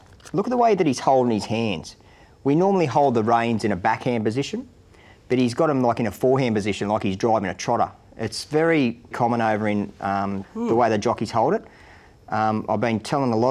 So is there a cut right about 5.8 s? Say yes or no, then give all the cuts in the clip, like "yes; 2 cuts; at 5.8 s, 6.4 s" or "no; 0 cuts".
no; 2 cuts; at 9.1 s, 10.4 s